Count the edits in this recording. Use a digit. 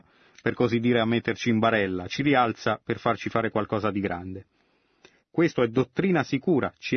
1